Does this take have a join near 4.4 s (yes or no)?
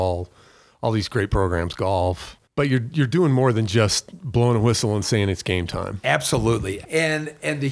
no